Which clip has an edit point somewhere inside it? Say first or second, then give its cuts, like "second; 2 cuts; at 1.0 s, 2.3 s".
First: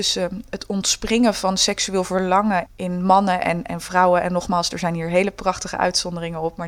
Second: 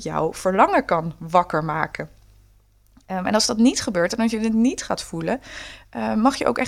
first; 1 cut; at 2.7 s